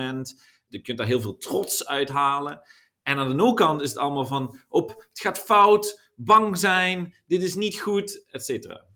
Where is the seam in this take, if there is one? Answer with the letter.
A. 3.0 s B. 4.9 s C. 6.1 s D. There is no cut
B